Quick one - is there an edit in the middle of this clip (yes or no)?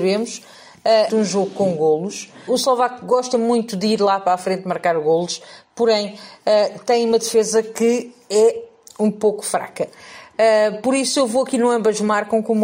yes